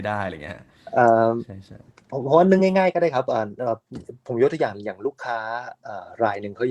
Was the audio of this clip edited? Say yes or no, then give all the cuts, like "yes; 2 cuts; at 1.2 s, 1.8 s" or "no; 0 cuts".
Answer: no; 0 cuts